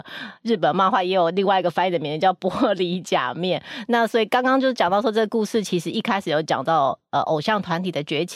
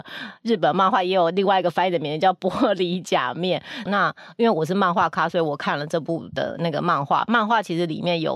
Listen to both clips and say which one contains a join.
second; 1 cut; at 3.9 s

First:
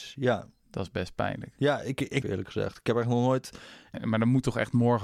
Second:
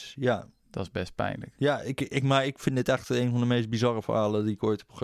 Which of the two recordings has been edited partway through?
first; 2 cuts; at 2.2 s, 3.9 s

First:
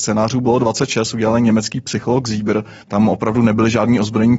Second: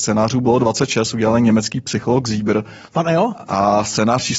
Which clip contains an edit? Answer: first; 1 cut; at 2.8 s

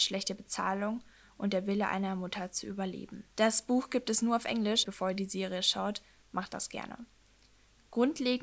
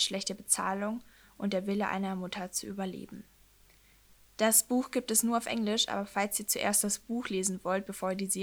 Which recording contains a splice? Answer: first; 2 cuts; at 3.3 s, 4.8 s

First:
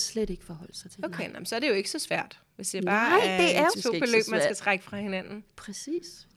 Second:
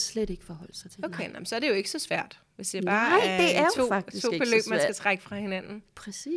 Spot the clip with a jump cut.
first; 1 cut; at 3.7 s

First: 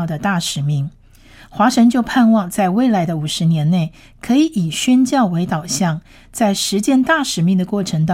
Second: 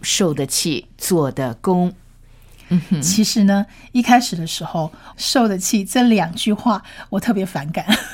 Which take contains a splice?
second; 2 cuts; at 2.6 s, 5.1 s

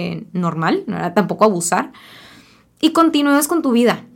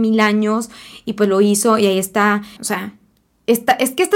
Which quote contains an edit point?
second; 1 cut; at 2.6 s

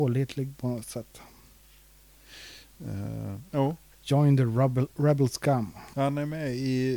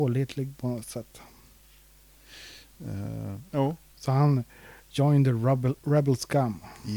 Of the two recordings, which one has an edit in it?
first; 2 cuts; at 3.9 s, 5.9 s

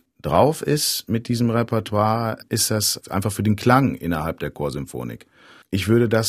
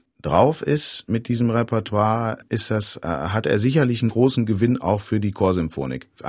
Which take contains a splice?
first; 1 cut; at 3.0 s

